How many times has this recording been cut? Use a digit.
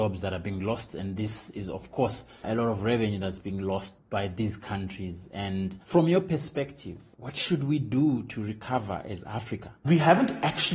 2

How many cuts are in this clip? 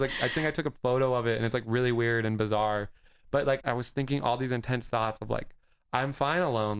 1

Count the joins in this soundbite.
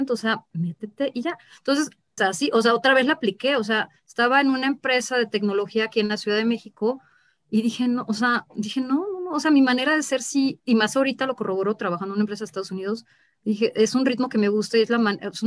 1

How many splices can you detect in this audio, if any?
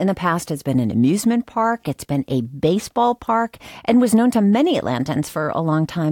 0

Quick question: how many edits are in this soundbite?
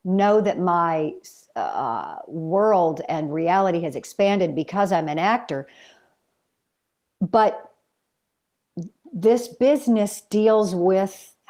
0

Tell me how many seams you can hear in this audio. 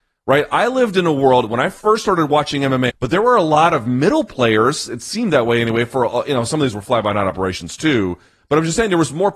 1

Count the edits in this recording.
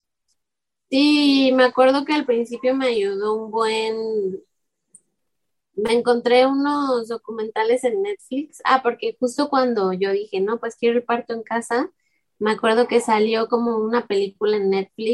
0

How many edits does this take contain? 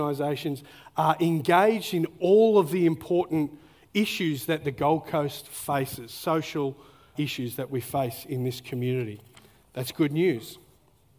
1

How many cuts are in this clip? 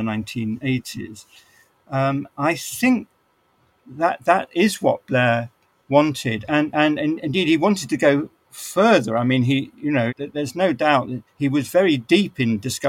2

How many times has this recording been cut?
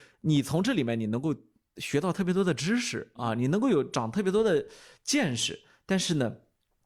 0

